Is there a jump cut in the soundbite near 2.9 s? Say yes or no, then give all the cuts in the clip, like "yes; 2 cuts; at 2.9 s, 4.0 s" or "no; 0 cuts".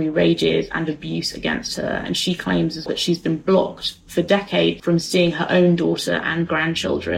yes; 2 cuts; at 2.9 s, 4.8 s